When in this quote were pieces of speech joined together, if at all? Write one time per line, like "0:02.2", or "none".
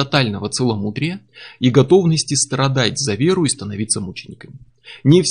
none